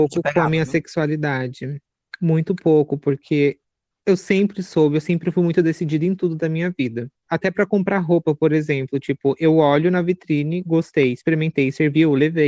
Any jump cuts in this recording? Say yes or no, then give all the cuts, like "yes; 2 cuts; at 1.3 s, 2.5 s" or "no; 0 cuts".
yes; 1 cut; at 7.3 s